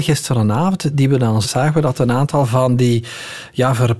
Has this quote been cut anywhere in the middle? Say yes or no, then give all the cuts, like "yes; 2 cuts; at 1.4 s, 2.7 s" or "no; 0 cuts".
yes; 1 cut; at 1.4 s